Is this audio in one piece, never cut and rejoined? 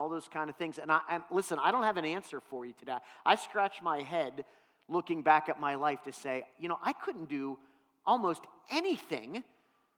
yes; 0 cuts

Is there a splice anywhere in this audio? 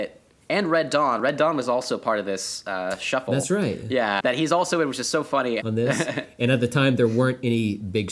yes; 2 cuts; at 4.2 s, 5.6 s

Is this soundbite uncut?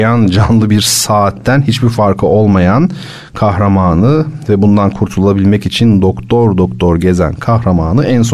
yes; 0 cuts

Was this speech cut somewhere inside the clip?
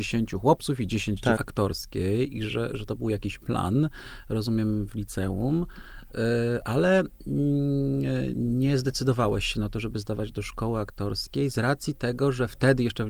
yes; 1 cut; at 1.4 s

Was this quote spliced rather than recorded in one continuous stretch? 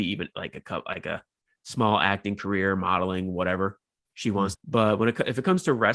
yes; 1 cut; at 4.5 s

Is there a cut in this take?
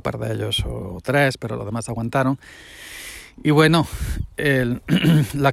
no; 0 cuts

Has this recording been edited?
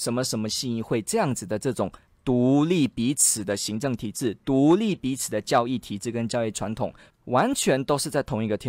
yes; 1 cut; at 7.1 s

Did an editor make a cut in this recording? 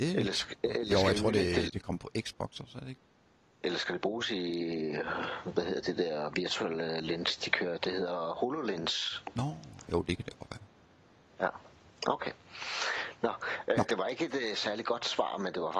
no; 0 cuts

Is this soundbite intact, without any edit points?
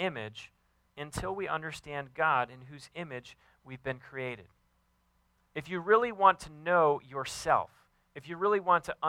yes; 0 cuts

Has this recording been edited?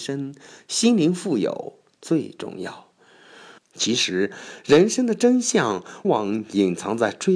yes; 2 cuts; at 3.6 s, 6.0 s

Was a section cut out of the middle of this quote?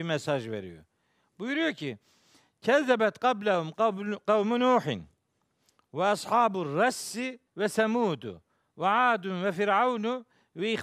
yes; 1 cut; at 7.5 s

